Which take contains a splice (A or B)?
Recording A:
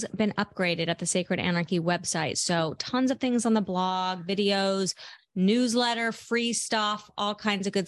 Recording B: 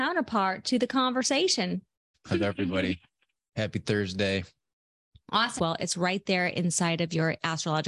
B